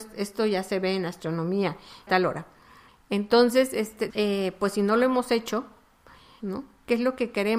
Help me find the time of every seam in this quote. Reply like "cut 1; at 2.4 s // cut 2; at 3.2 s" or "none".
cut 1; at 2.1 s // cut 2; at 4.1 s // cut 3; at 6.4 s